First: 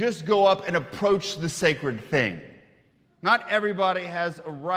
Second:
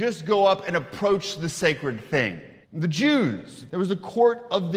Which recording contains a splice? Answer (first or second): second